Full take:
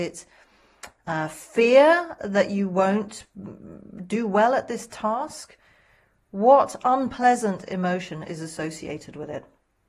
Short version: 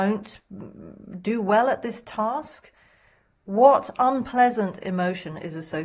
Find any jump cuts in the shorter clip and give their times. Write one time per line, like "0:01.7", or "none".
none

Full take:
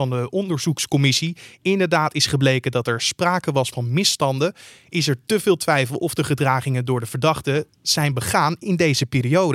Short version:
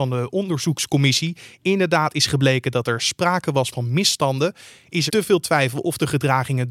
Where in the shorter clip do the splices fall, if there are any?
0:05.1

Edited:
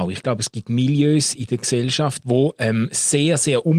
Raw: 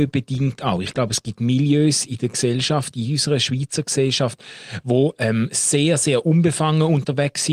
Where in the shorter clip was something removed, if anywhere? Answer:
0:02.2

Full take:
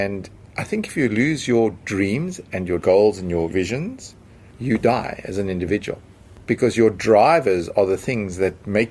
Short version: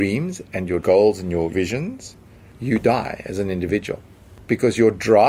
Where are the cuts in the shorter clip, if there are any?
none

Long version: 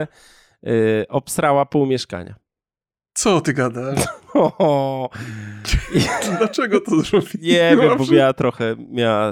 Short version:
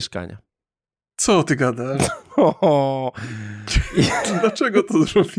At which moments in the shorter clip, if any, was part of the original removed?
none

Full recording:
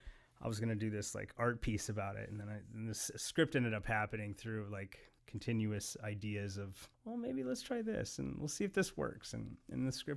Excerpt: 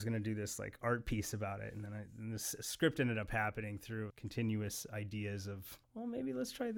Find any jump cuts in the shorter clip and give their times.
0:04.1

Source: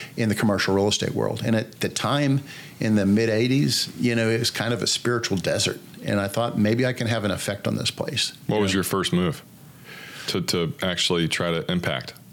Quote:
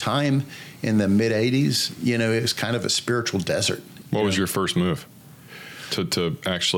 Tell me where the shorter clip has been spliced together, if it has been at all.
0:04.0

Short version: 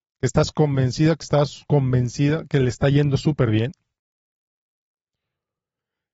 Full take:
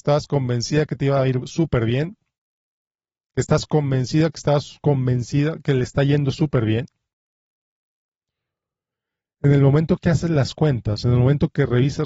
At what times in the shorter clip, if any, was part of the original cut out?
none

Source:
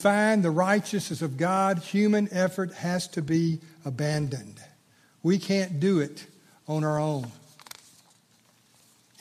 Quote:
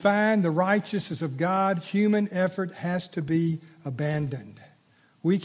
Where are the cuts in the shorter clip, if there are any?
none

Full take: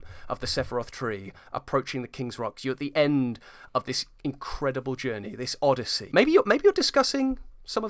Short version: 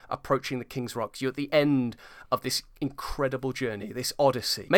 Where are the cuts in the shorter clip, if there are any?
none

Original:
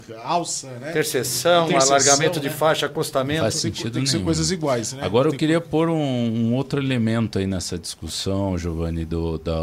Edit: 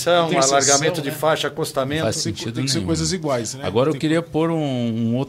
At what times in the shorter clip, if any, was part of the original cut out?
none

